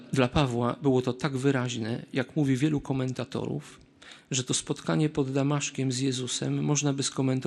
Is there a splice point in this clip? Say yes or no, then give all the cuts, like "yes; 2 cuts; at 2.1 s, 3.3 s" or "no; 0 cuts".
no; 0 cuts